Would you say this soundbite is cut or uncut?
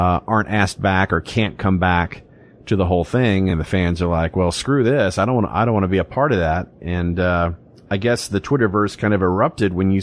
uncut